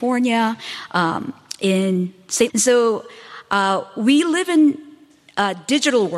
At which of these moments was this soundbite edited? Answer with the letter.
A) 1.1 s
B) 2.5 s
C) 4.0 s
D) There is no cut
B